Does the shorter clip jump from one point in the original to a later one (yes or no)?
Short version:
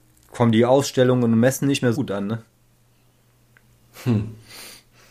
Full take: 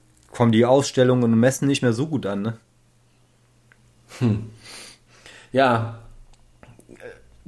yes